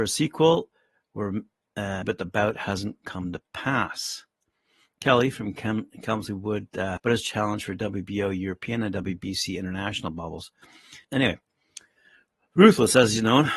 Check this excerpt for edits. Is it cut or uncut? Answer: cut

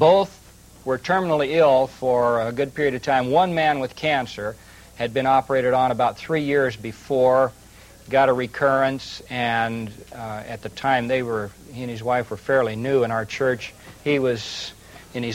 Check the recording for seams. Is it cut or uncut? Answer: uncut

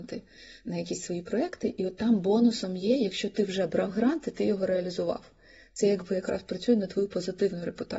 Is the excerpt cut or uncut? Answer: uncut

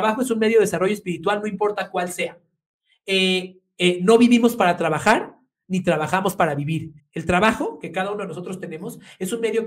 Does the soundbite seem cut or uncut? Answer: cut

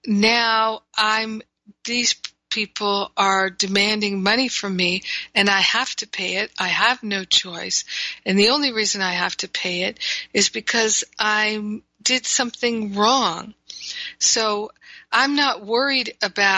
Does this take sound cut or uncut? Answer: uncut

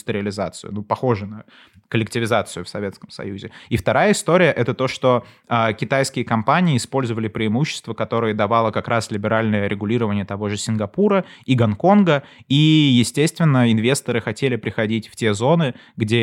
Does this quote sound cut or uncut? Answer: uncut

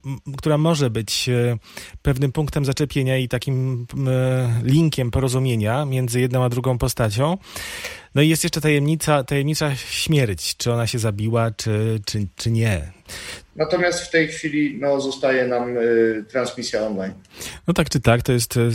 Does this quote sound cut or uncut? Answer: cut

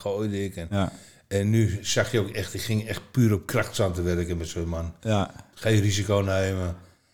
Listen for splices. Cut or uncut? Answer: uncut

